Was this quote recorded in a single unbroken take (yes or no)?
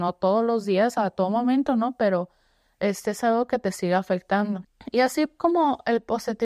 yes